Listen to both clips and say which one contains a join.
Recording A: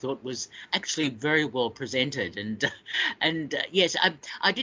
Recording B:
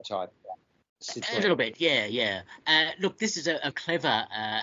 B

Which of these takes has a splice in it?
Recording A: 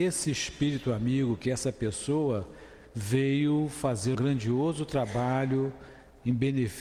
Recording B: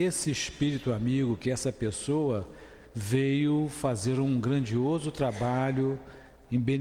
A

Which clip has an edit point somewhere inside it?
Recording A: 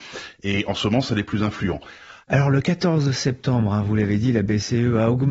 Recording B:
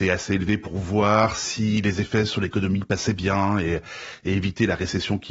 A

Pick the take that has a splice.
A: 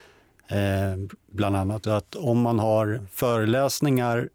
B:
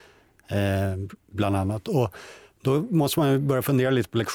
A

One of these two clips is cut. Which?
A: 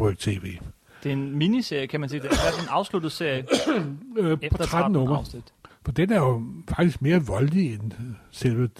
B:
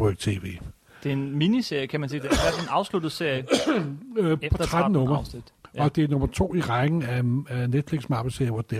A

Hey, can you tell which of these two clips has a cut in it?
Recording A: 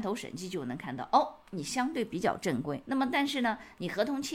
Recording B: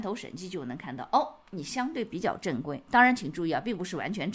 A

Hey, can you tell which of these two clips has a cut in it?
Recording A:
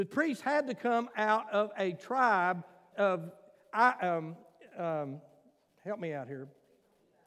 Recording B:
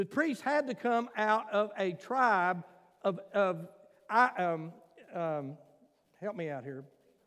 A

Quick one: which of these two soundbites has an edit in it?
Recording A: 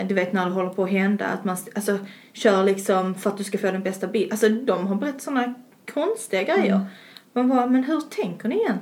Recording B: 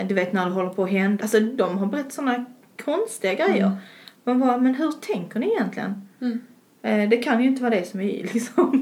B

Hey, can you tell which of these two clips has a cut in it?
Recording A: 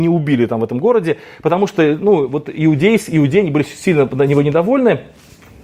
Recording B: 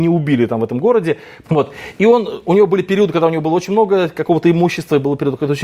B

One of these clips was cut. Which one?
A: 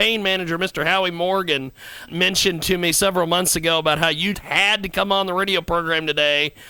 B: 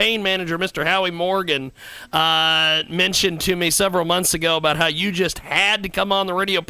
A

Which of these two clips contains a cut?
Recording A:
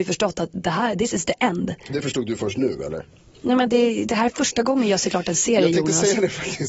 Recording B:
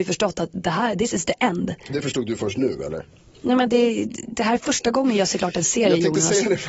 A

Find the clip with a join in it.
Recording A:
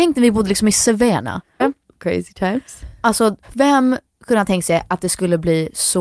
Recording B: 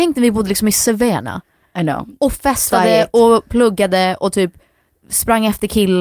A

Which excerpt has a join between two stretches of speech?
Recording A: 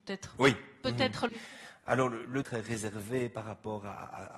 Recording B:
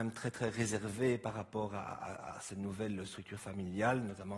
A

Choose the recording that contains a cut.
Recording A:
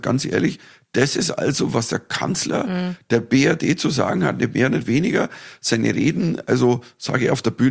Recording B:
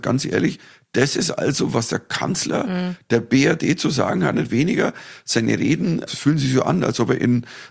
B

